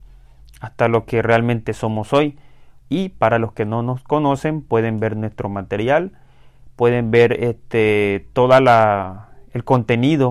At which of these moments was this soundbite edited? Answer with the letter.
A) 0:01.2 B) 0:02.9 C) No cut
B